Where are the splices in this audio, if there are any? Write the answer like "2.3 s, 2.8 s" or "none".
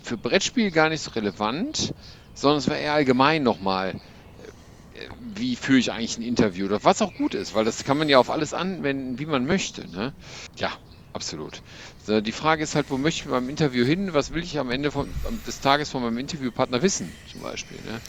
10.5 s, 11.9 s, 14.5 s

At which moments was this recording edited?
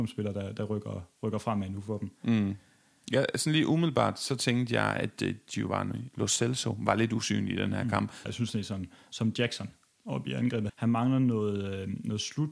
8.3 s, 10.7 s

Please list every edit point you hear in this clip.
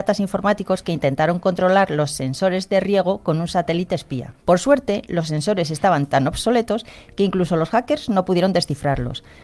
4.4 s

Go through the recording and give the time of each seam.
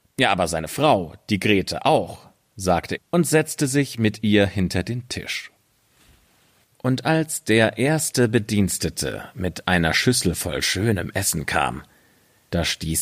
3.0 s

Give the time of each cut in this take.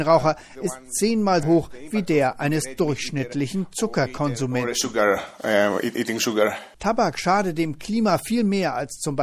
1.4 s, 6.7 s

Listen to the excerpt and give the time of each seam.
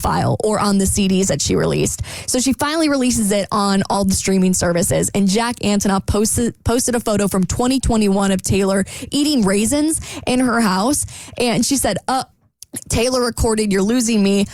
12.3 s

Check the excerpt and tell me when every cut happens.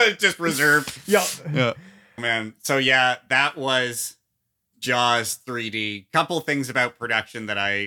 2.2 s

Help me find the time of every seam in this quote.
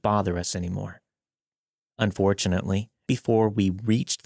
3.1 s

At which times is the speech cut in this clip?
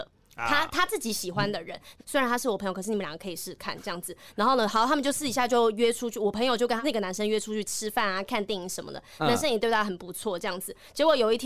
2.0 s, 3.4 s

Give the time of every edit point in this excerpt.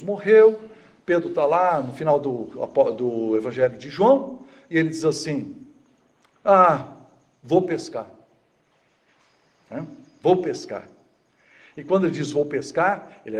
none

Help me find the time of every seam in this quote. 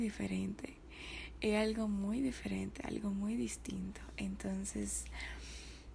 none

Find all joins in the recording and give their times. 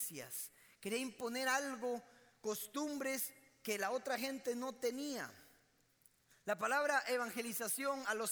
none

